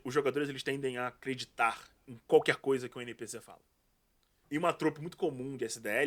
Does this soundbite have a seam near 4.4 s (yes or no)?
yes